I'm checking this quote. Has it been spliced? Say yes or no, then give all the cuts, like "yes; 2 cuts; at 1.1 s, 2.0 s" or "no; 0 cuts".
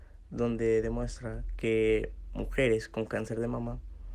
no; 0 cuts